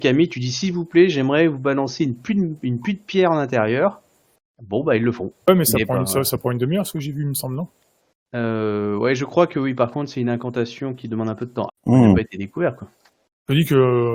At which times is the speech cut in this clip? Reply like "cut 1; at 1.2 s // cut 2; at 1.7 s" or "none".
cut 1; at 11.7 s